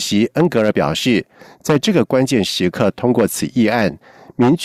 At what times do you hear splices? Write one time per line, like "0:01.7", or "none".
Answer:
none